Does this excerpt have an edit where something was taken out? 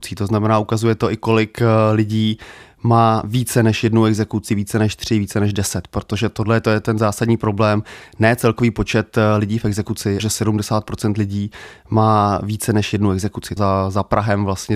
yes; 2 cuts; at 10.2 s, 13.6 s

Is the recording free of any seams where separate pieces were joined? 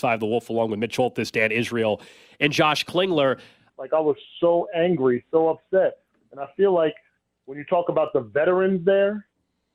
no; 1 cut; at 3.7 s

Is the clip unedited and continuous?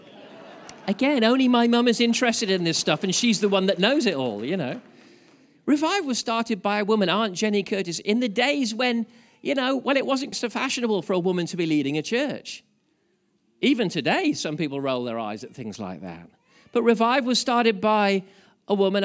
no; 1 cut; at 10.3 s

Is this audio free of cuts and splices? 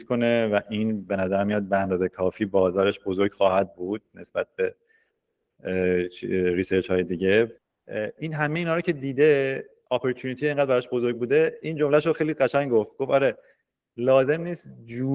yes; 0 cuts

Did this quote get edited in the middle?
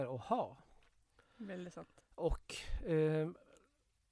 yes; 1 cut; at 2.0 s

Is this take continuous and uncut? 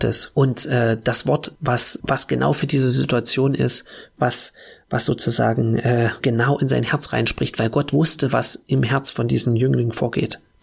yes; 0 cuts

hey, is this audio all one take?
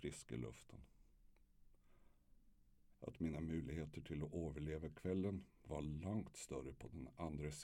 no; 1 cut; at 2.9 s

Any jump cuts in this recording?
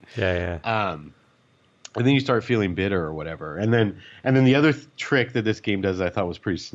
no; 0 cuts

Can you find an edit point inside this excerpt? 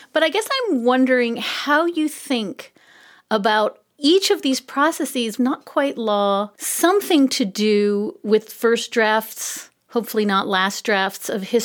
yes; 3 cuts; at 5.4 s, 6.5 s, 9.8 s

